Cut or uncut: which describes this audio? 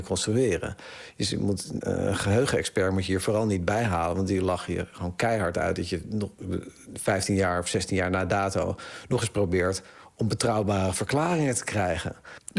cut